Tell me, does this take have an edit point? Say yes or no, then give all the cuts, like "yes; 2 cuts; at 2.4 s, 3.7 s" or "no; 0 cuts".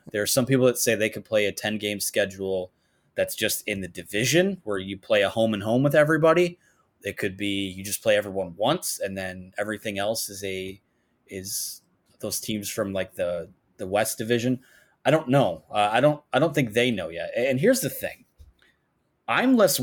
no; 0 cuts